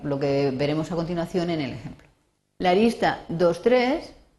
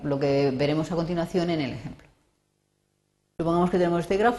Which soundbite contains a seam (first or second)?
first